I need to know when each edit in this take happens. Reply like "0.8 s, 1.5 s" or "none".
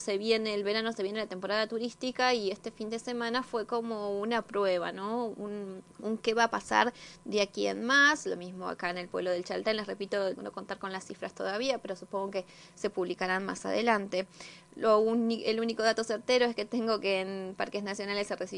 5.9 s, 10.3 s